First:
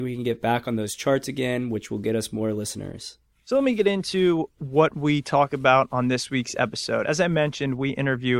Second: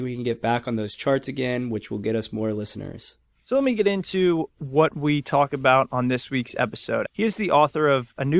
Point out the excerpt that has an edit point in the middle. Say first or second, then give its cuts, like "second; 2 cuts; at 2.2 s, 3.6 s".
second; 1 cut; at 7.1 s